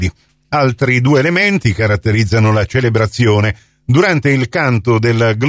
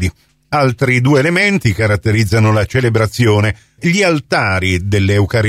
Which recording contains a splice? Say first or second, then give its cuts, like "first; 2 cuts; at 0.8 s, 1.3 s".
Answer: second; 1 cut; at 3.8 s